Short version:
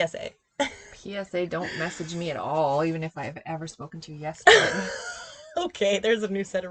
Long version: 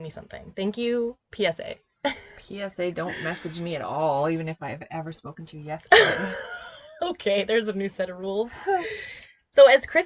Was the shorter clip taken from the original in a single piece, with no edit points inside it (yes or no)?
yes